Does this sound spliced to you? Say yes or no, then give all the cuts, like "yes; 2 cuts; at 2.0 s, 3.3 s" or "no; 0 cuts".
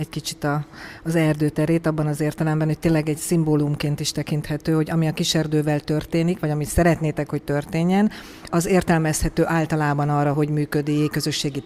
yes; 2 cuts; at 8.5 s, 10.3 s